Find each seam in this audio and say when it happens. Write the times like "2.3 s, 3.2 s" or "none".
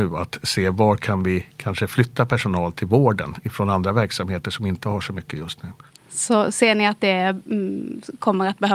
none